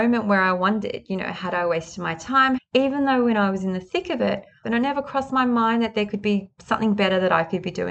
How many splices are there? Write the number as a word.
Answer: two